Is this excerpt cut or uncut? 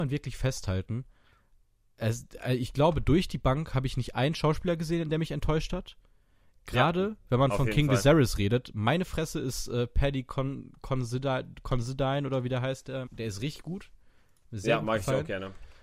cut